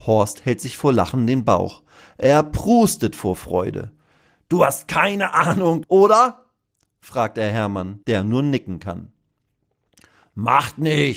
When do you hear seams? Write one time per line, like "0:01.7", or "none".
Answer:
0:05.8
0:08.0

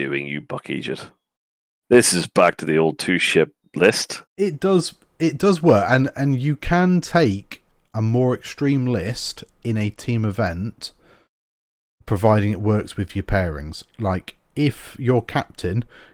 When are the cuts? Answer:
0:04.3

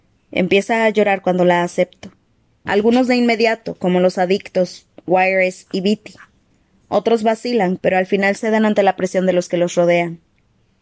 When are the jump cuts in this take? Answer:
0:02.6
0:07.8

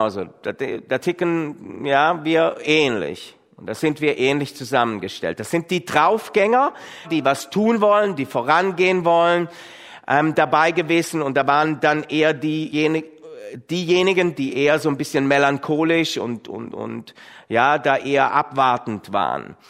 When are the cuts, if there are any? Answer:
0:07.0
0:12.7

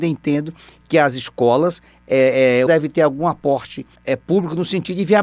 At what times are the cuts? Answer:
0:02.7
0:03.9

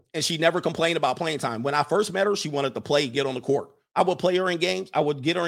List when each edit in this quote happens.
0:03.9

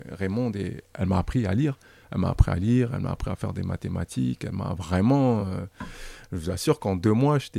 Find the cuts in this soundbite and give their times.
none

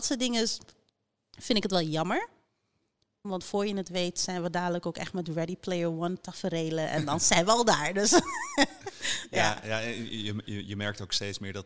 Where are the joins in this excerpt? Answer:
0:03.2

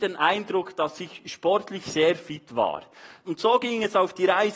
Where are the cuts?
0:03.2

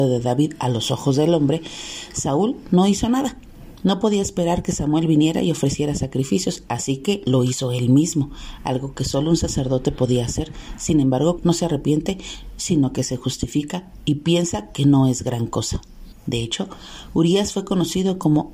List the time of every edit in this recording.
0:11.4
0:16.1

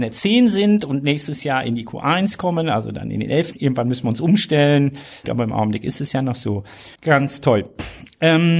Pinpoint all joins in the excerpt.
0:03.5
0:05.2
0:07.0

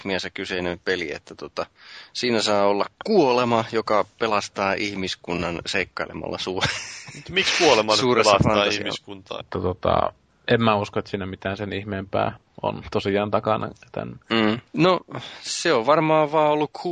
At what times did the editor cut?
0:09.4
0:14.7

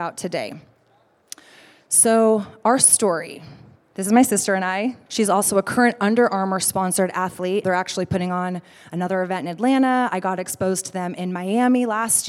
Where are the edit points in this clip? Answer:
0:05.1
0:07.6

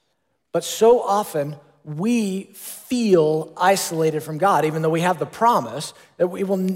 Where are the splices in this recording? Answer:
none

